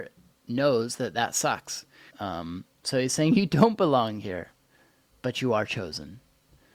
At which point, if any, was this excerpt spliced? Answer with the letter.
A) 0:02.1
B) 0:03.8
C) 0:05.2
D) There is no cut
A